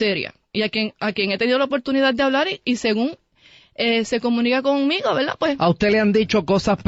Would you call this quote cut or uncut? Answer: uncut